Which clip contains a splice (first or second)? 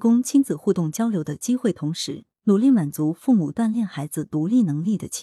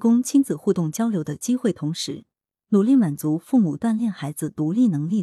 first